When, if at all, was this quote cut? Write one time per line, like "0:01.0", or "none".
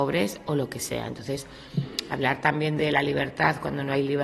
none